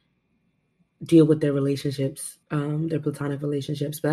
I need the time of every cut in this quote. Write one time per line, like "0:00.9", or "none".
0:02.4